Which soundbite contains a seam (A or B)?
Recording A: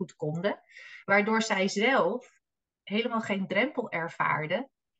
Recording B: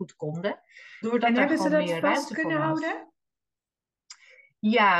B